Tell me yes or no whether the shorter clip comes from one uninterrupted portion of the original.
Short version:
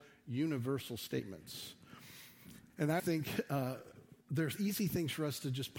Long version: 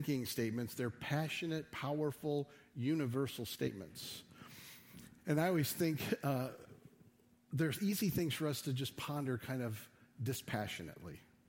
no